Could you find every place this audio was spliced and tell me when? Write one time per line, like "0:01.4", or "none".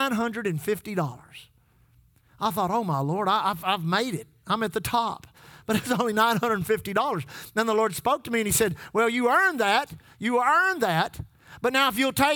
none